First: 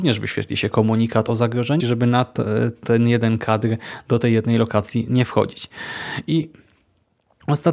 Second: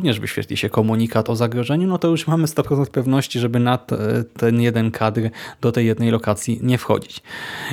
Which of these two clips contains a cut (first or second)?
first